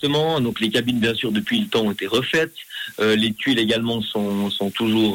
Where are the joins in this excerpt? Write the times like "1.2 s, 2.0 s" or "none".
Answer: none